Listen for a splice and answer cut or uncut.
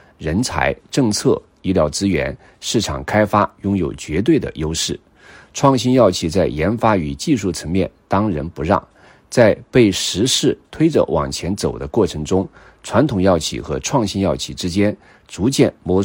uncut